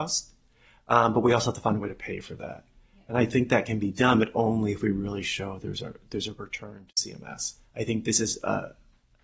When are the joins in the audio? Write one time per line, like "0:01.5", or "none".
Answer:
0:07.6